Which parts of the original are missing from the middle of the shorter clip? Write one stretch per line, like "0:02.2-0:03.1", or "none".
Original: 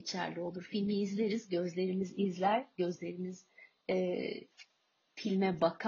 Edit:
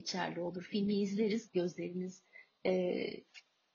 0:01.5-0:02.7